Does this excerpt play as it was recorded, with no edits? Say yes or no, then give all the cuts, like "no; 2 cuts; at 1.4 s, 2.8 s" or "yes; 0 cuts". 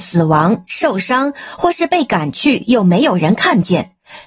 yes; 0 cuts